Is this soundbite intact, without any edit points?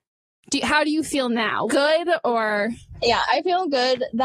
no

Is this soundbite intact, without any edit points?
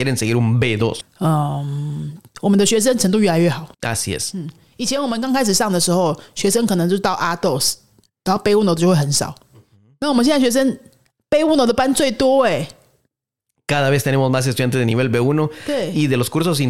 no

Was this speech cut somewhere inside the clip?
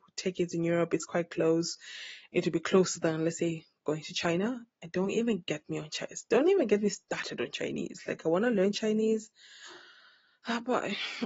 no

